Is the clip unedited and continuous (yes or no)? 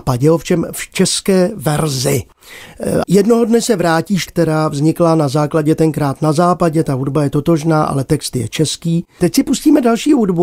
no